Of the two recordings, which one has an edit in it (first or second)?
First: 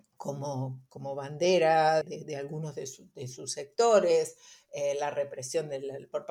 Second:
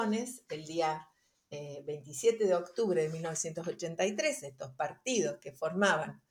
first